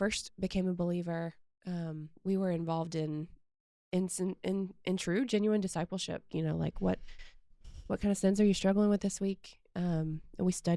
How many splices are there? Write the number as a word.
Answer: two